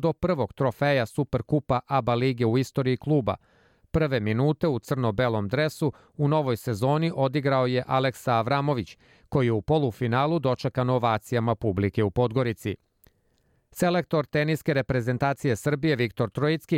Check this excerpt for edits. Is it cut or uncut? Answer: uncut